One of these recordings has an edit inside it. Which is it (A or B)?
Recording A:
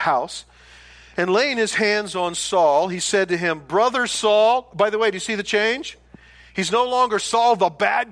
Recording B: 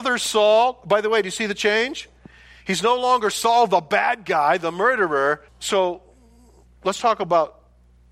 B